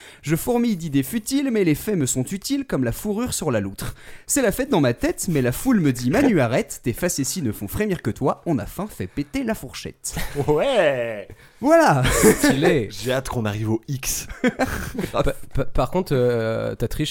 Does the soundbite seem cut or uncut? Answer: uncut